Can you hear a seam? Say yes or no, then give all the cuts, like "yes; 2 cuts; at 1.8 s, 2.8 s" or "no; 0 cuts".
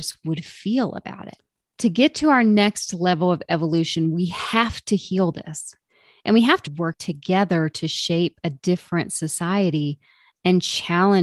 yes; 1 cut; at 6.7 s